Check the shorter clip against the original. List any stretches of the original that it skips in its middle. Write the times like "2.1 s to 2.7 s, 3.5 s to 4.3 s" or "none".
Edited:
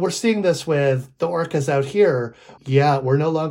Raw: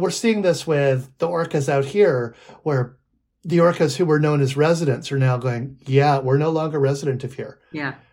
2.6 s to 5.8 s